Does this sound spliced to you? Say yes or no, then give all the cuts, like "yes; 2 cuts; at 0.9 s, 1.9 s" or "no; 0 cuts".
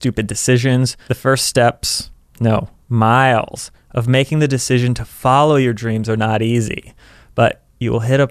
yes; 1 cut; at 1.1 s